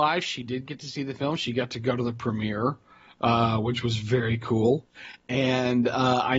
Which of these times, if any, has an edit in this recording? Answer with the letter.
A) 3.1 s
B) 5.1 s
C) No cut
C